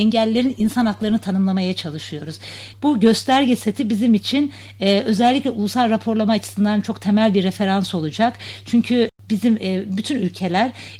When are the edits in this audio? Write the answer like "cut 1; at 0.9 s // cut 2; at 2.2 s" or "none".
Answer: cut 1; at 2.7 s

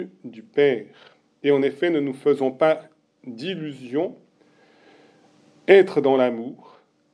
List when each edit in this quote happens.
none

